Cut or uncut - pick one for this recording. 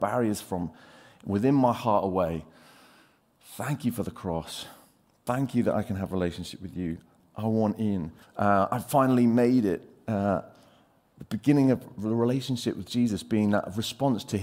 cut